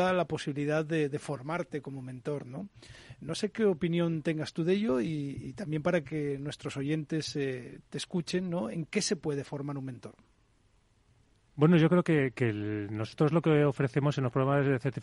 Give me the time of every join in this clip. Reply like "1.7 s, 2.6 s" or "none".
none